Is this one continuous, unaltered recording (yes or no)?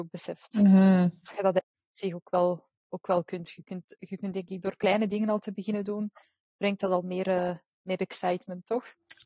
yes